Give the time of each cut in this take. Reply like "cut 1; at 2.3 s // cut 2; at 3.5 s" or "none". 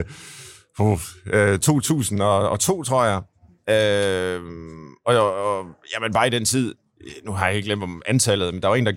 none

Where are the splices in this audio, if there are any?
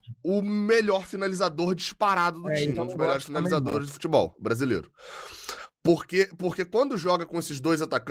cut 1; at 2.7 s

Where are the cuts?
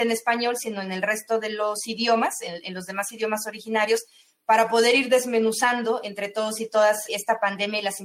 cut 1; at 7.1 s

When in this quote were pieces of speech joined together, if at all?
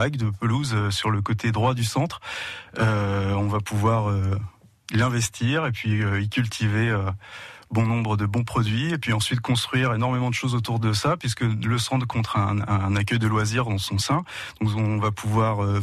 none

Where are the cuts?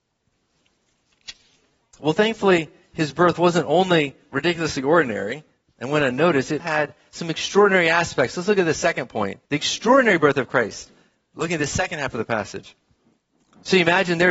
cut 1; at 6.6 s // cut 2; at 9.5 s

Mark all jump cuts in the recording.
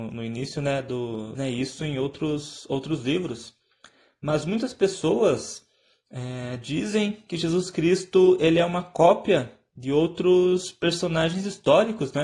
cut 1; at 1.3 s

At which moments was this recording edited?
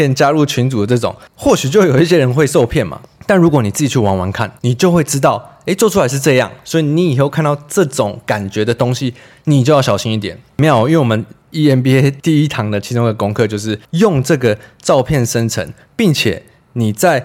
none

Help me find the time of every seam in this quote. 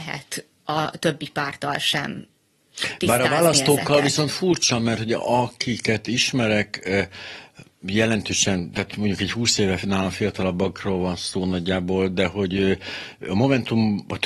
none

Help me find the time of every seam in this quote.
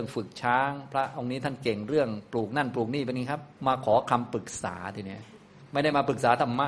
cut 1; at 3.6 s

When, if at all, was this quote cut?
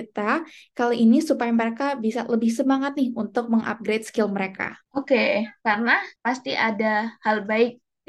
cut 1; at 5.6 s

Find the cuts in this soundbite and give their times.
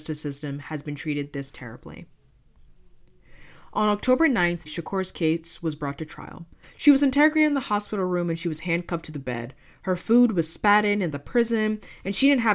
cut 1; at 4.7 s // cut 2; at 6.6 s

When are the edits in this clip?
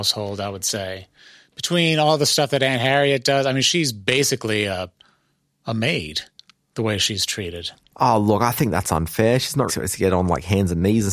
cut 1; at 9.7 s

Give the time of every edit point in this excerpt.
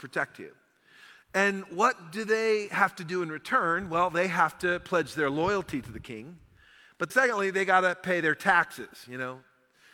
cut 1; at 7.1 s

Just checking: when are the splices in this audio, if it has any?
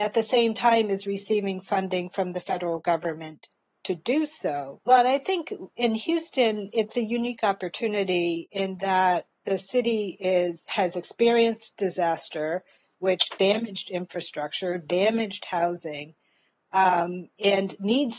cut 1; at 4.9 s // cut 2; at 9.3 s

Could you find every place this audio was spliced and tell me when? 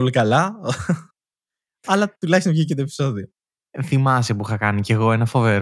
none

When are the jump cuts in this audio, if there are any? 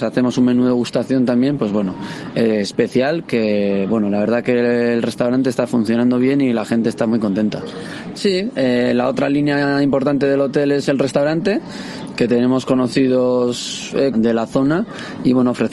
cut 1; at 8.1 s // cut 2; at 14.1 s

